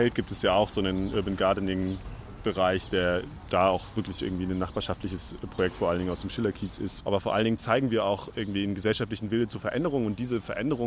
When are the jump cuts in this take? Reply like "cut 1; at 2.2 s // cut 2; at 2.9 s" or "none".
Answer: cut 1; at 7.0 s